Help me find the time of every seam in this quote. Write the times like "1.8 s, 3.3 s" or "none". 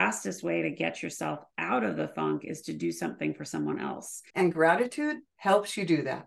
4.3 s